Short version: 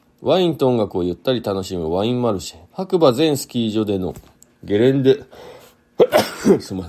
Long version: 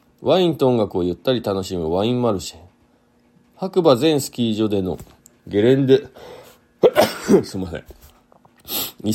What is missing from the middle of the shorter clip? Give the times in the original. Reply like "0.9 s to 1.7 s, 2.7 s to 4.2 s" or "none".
2.6 s to 3.5 s